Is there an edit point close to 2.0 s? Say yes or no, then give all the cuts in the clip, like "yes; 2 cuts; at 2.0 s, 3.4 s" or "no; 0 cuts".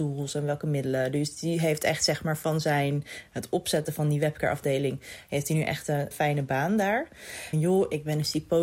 no; 2 cuts; at 6.1 s, 7.5 s